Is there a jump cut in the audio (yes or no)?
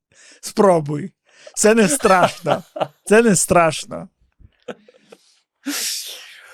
no